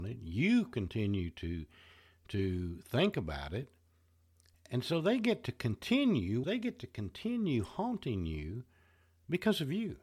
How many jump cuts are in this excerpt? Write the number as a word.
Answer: one